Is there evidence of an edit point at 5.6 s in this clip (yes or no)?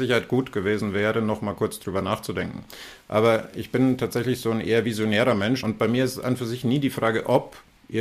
yes